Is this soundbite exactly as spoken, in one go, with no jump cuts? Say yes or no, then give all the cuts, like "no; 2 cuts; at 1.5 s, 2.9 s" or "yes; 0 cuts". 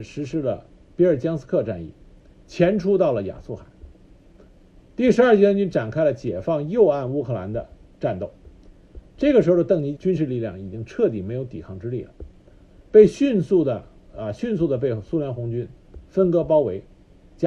no; 1 cut; at 10.0 s